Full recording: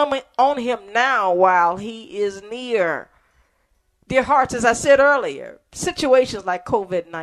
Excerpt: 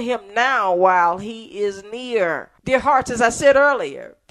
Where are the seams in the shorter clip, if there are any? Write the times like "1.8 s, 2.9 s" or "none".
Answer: 2.6 s

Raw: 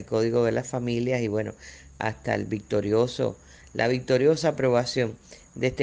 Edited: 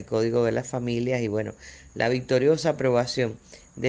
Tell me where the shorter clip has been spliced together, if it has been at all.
1.9 s

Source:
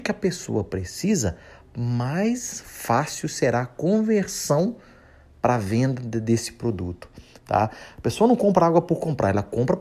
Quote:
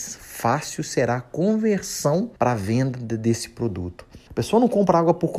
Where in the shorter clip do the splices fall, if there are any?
2.4 s, 4.3 s

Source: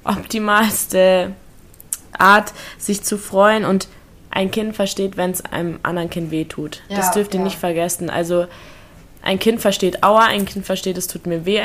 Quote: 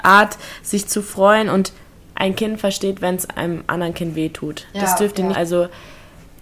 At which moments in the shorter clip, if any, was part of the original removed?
5.3 s

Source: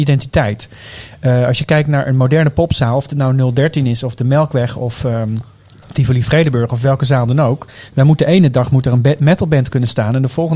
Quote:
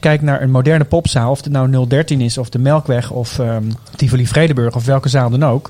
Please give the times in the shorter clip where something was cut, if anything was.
3.9 s

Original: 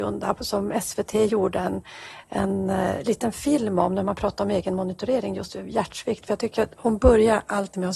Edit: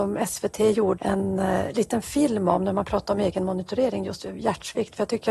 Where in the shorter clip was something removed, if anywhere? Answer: 1.0 s

